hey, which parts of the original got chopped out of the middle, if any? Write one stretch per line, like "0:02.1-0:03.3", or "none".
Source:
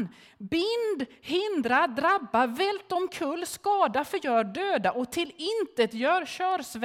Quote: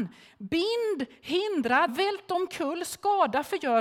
0:01.9-0:02.5